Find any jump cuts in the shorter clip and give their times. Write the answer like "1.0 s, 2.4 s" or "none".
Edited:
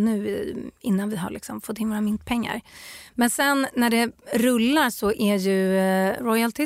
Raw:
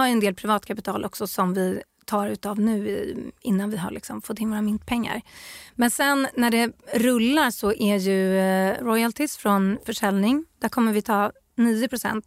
none